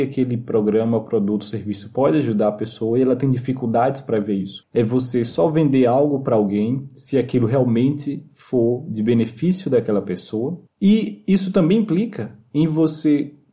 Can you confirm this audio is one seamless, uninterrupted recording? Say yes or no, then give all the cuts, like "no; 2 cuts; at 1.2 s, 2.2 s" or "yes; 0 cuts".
no; 2 cuts; at 4.6 s, 10.7 s